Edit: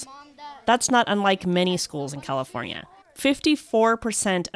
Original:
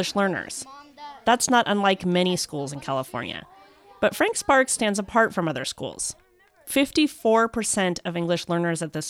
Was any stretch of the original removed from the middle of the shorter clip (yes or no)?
yes